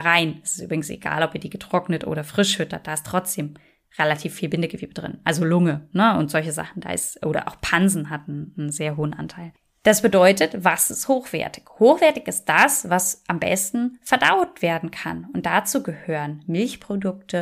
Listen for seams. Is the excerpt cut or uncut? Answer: uncut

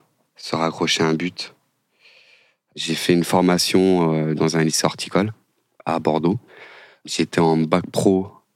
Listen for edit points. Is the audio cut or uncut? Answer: uncut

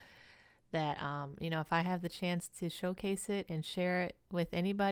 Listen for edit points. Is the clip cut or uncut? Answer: uncut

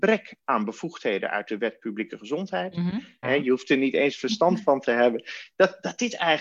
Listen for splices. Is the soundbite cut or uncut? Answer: cut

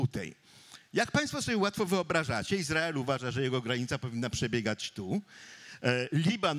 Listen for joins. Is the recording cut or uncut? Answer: uncut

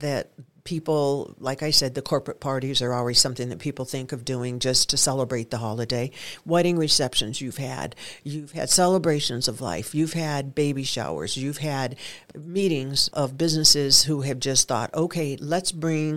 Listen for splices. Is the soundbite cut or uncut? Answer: uncut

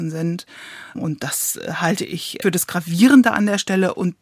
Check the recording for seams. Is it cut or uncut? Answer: cut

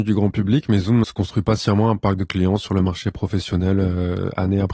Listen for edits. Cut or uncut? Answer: cut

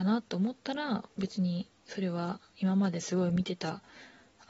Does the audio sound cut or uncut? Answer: uncut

